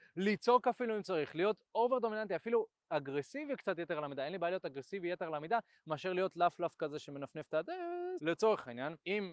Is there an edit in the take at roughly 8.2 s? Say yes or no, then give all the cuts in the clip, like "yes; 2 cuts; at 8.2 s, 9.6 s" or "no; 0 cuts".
yes; 1 cut; at 8.2 s